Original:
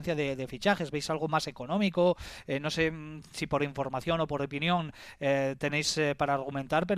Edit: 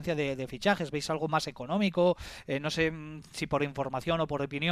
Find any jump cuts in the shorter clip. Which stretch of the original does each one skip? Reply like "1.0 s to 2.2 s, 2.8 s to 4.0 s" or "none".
none